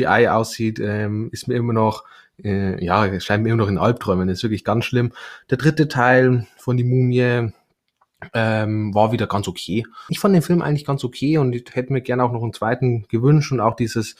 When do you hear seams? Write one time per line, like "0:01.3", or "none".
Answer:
0:10.1